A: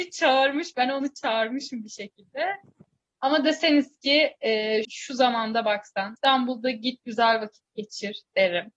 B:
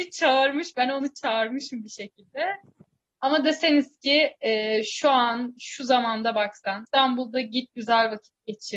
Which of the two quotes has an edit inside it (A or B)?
A